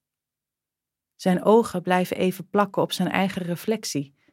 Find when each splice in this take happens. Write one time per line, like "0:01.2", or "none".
none